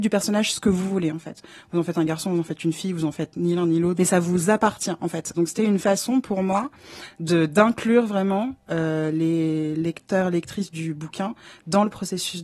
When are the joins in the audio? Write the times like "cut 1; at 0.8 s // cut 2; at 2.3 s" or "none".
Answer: cut 1; at 4.0 s // cut 2; at 5.3 s